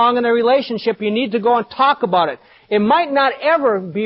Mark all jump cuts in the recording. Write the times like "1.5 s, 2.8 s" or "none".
none